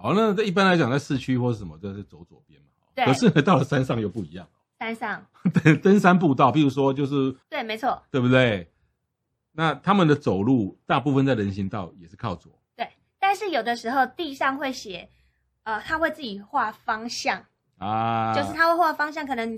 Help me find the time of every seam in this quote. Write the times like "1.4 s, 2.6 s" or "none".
7.4 s